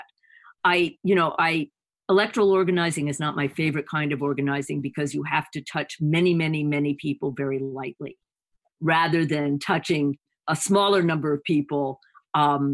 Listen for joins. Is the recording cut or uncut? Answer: uncut